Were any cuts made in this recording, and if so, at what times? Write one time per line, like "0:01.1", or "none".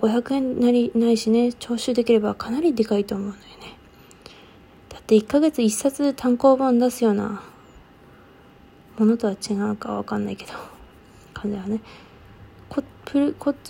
none